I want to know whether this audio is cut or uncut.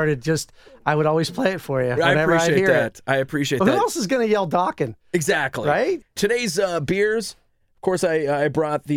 uncut